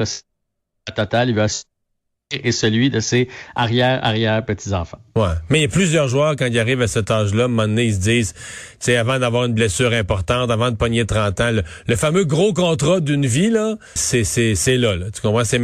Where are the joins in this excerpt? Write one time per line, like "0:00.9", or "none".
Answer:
0:14.0